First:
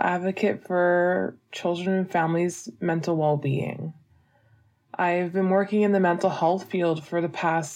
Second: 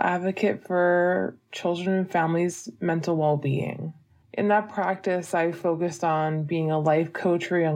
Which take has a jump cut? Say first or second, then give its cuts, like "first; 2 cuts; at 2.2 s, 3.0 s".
second; 1 cut; at 4.2 s